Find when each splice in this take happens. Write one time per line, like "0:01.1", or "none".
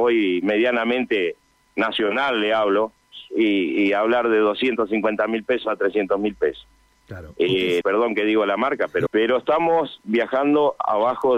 0:07.8
0:09.1